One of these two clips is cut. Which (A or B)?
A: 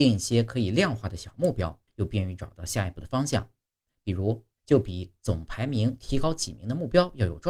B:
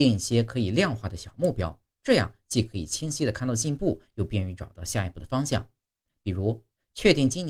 A